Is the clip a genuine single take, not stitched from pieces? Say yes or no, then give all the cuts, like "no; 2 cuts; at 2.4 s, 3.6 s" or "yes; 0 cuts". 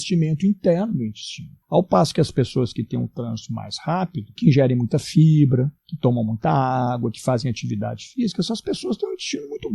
no; 1 cut; at 4.4 s